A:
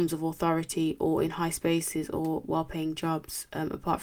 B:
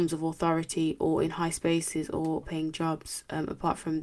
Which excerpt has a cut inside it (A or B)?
B